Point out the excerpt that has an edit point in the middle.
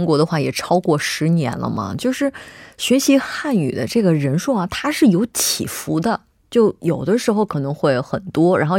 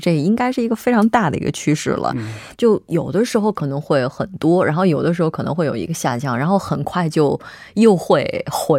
second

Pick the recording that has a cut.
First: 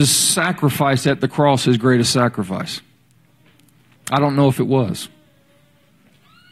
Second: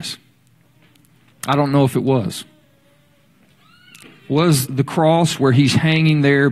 second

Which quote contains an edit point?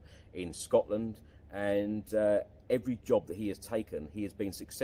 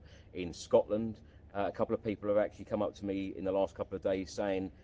second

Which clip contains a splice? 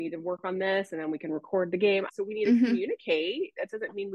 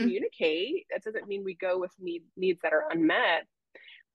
first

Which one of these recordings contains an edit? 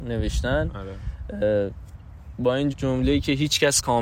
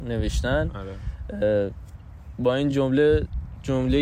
first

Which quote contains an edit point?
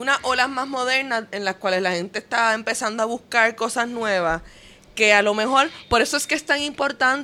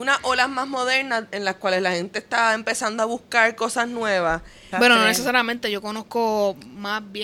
second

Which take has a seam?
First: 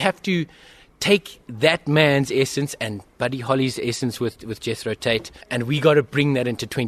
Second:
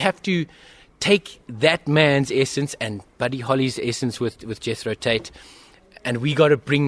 first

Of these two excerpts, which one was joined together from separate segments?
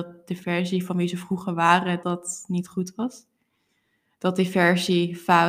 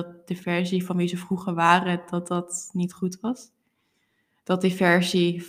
first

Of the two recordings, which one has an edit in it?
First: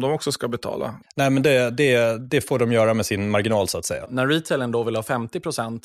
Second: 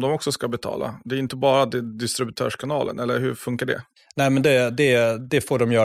first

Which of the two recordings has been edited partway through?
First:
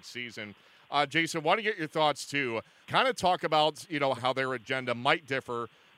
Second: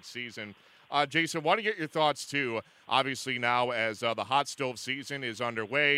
first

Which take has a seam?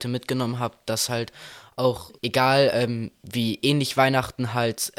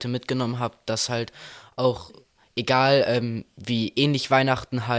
first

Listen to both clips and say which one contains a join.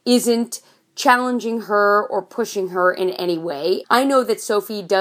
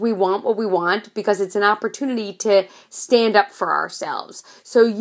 first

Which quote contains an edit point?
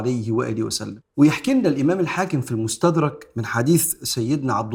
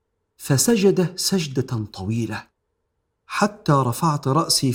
first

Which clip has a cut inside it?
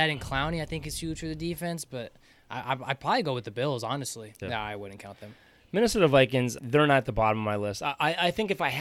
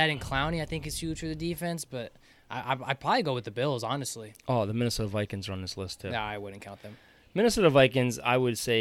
first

